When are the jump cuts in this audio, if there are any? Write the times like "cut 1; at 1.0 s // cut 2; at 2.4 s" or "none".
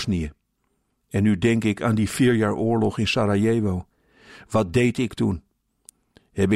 cut 1; at 1.0 s